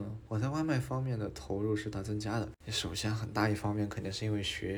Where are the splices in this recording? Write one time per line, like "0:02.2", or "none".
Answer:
0:01.9

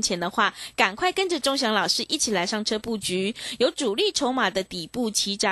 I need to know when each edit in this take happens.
none

